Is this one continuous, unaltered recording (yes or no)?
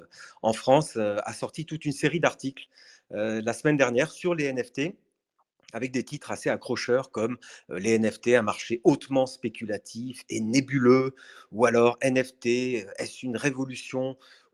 yes